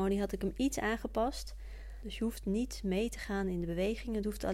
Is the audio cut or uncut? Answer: cut